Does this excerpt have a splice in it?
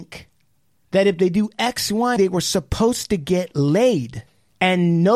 yes; 1 cut; at 2.2 s

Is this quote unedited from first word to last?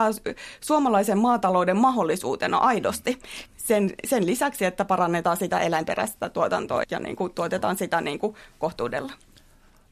no; 2 cuts; at 3.5 s, 6.8 s

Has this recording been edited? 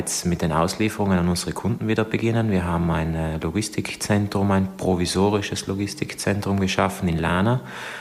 no; 0 cuts

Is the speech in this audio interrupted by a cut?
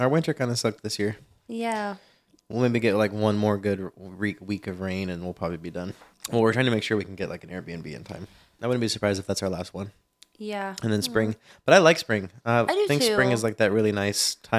yes; 2 cuts; at 6.1 s, 8.6 s

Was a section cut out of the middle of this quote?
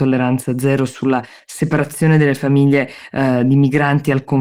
no; 0 cuts

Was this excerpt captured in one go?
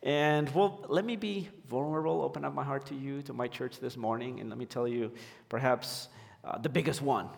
yes; 0 cuts

